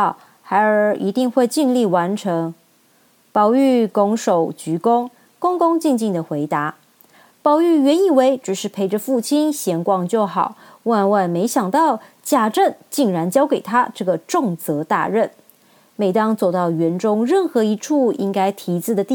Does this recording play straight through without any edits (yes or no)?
yes